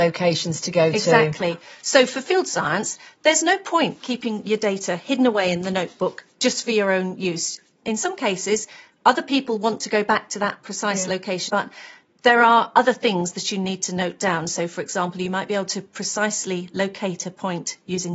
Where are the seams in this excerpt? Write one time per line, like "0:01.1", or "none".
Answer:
0:11.5